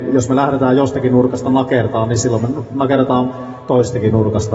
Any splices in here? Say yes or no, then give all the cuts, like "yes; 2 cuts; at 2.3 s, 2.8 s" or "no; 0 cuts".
no; 0 cuts